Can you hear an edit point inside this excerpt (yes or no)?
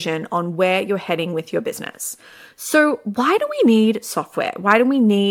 no